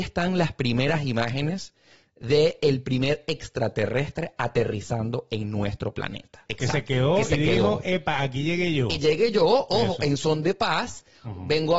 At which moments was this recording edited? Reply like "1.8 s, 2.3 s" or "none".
6.5 s